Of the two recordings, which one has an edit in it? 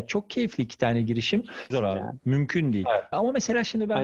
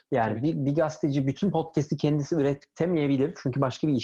first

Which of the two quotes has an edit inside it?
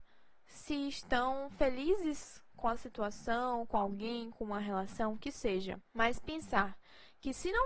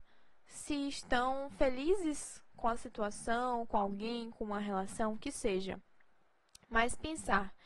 first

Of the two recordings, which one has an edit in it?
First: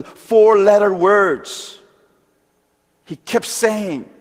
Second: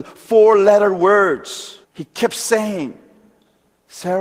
second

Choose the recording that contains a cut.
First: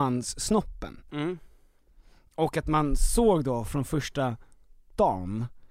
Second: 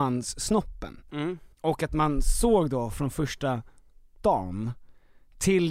second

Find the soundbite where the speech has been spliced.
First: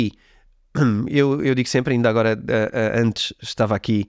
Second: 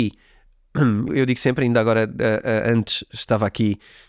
second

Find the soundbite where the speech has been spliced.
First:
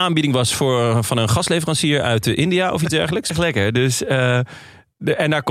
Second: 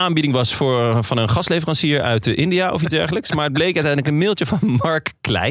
first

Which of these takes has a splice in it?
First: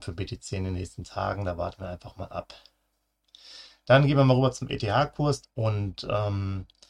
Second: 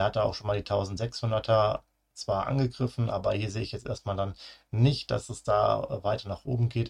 first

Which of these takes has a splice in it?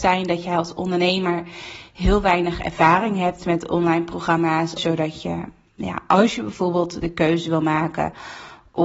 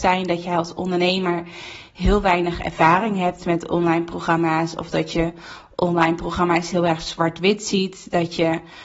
first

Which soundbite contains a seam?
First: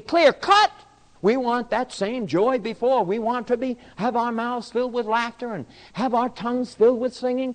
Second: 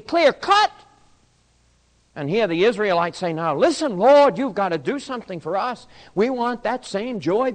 first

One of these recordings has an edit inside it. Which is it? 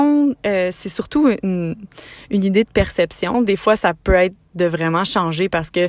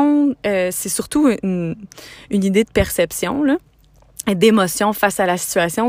first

